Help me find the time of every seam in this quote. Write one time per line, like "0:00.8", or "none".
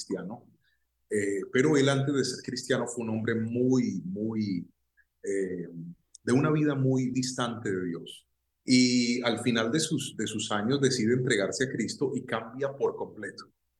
0:07.1
0:08.6